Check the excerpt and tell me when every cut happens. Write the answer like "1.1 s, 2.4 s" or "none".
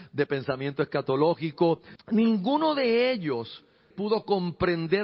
2.0 s, 3.9 s